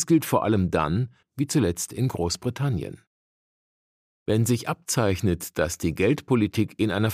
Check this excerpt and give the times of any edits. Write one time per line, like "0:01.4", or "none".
0:01.2